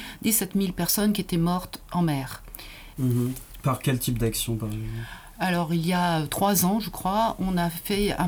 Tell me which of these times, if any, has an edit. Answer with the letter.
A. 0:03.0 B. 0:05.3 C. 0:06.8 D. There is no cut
A